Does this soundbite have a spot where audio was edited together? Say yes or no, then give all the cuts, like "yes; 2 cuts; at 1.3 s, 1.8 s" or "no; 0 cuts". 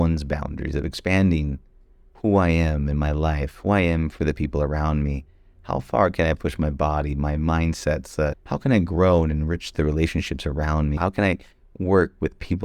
yes; 1 cut; at 11.0 s